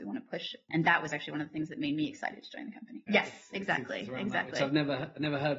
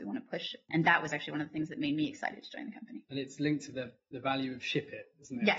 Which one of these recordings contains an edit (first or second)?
first